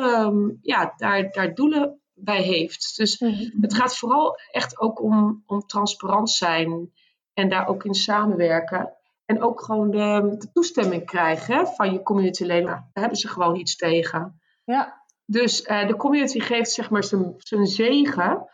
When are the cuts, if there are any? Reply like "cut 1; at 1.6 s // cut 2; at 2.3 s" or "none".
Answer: cut 1; at 12.7 s